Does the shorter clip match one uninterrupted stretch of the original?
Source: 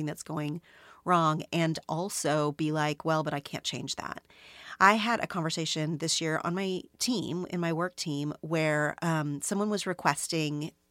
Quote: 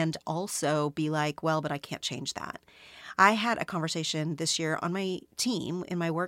yes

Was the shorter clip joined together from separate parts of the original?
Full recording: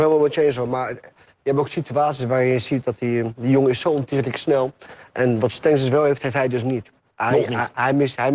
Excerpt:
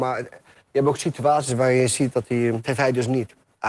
yes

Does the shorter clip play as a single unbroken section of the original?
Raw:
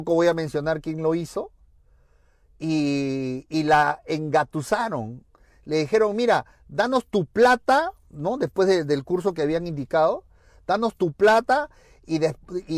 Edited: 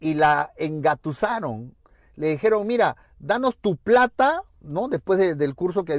yes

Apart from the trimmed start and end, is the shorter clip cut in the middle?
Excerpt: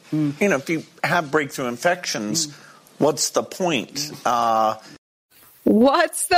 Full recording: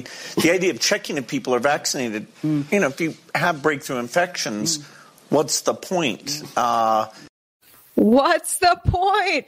no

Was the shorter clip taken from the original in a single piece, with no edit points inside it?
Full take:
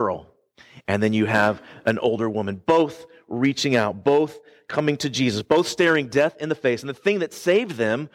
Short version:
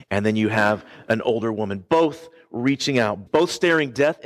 no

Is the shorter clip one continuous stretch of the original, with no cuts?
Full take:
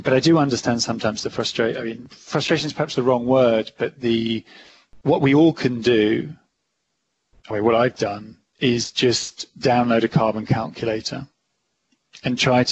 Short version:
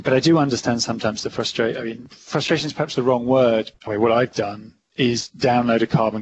no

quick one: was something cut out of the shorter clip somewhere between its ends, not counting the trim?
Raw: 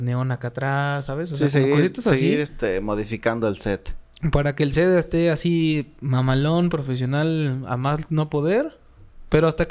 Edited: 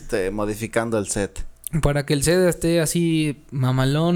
no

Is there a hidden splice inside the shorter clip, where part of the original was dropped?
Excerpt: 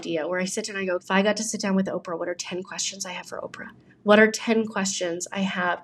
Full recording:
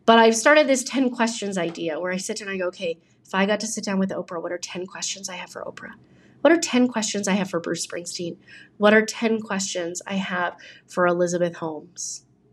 yes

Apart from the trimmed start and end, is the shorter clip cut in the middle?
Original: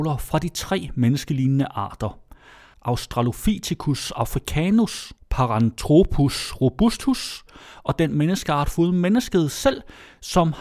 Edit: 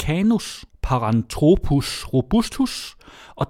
no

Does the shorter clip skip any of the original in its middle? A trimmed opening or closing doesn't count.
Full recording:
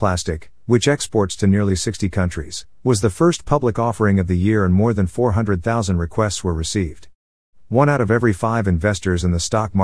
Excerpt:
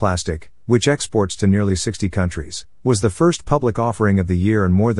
no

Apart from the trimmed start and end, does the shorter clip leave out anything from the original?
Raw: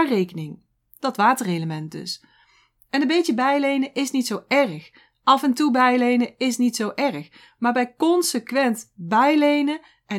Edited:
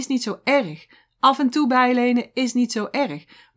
no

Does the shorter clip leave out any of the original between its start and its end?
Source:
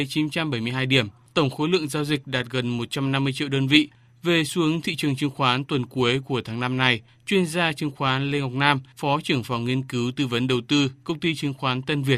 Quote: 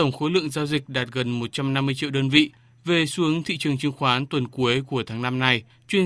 no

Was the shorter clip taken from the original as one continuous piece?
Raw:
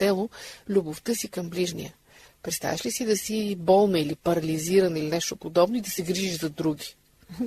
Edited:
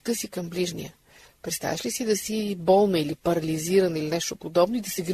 yes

